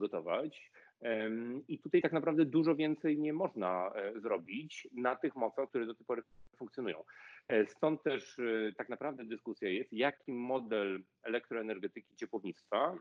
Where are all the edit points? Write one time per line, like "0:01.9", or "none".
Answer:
0:05.7